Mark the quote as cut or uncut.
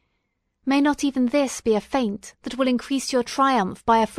uncut